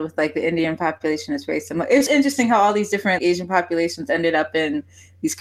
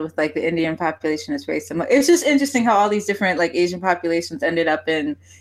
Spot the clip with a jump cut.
first; 2 cuts; at 2.1 s, 3.2 s

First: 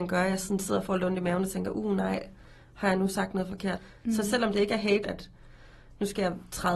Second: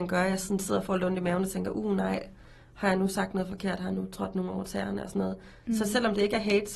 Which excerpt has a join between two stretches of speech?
first; 2 cuts; at 3.8 s, 5.0 s

